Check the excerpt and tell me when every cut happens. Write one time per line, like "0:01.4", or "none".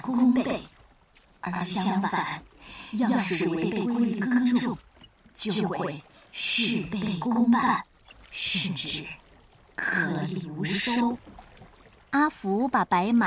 none

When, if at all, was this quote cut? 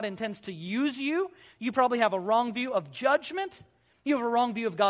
none

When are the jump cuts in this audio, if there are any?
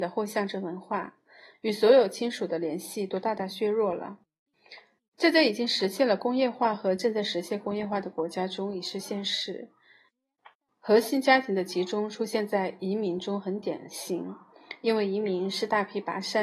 0:01.5

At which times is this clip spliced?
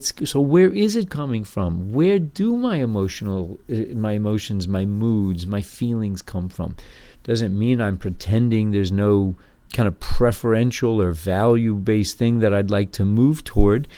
0:07.1
0:09.7

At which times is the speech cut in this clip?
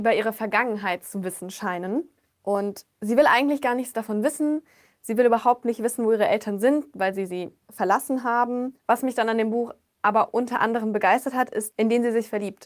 0:08.8
0:11.7

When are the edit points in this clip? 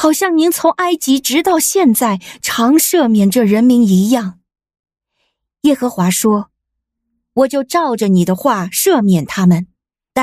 none

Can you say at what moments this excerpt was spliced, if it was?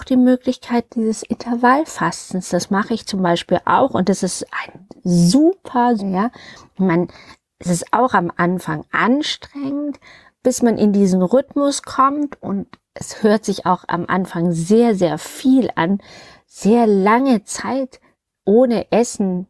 0:06.0

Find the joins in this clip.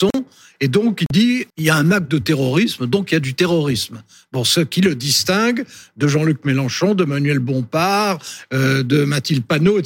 0:01.5

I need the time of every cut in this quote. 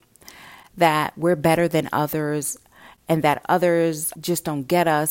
none

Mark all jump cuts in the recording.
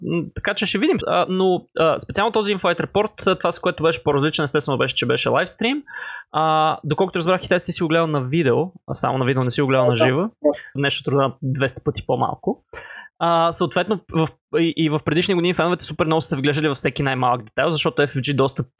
0:01.0
0:10.8

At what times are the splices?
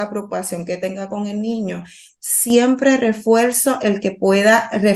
0:02.1

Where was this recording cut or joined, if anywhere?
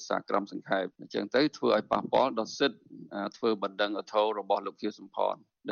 none

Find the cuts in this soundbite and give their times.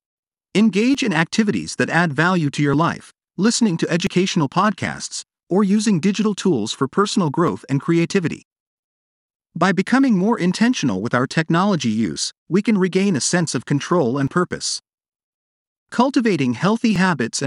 0:03.3

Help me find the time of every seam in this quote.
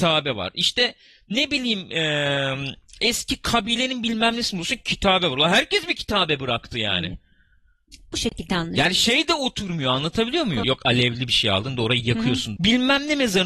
0:10.6
0:12.6

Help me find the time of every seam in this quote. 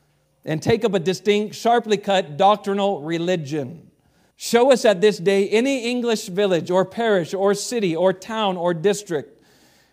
0:04.3

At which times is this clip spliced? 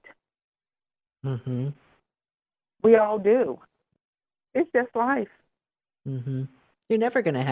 0:01.1
0:04.5

